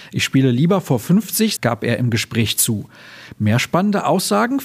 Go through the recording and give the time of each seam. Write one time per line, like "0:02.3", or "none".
0:01.6